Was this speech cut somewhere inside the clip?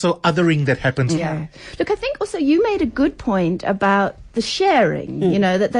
yes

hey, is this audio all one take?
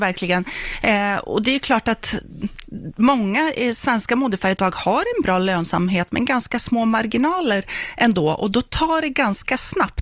yes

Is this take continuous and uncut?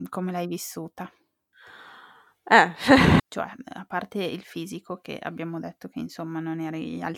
no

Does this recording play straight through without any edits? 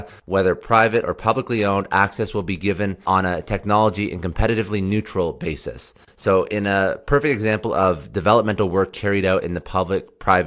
no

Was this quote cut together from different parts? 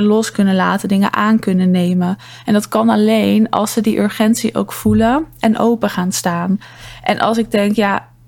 no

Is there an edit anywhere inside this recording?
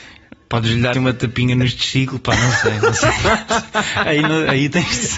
yes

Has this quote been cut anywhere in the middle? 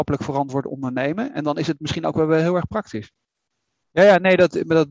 yes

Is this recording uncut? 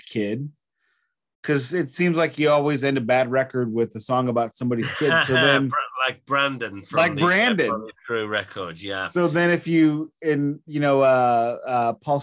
yes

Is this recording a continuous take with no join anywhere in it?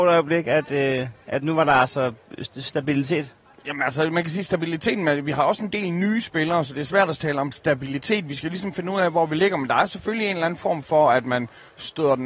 yes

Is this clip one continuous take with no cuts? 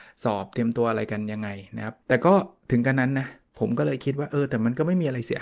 no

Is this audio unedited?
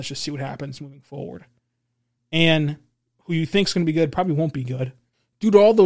no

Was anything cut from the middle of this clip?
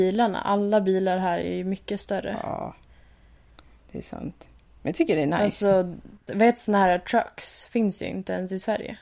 yes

